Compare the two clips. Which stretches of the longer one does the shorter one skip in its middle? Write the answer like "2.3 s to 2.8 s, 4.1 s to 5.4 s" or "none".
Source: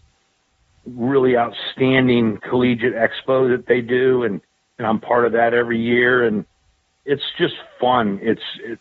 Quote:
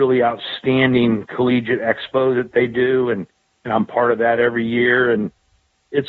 none